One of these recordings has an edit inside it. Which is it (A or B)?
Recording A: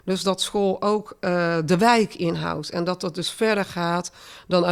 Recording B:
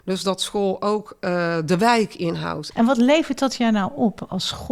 B